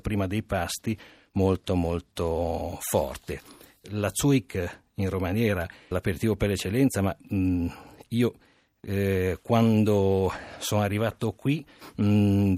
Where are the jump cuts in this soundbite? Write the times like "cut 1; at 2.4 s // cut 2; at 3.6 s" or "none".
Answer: cut 1; at 3.8 s // cut 2; at 5.9 s

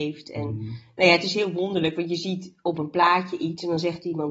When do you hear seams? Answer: none

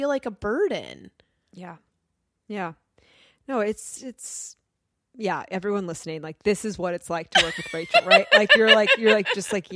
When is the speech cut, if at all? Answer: none

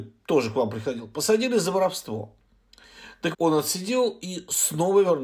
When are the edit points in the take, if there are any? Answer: cut 1; at 3.3 s

